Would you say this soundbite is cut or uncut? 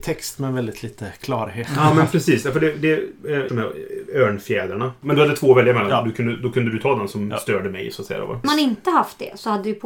cut